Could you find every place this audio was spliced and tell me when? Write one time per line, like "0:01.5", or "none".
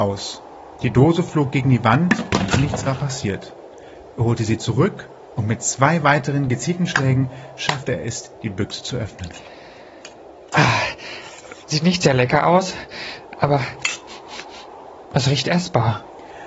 0:11.6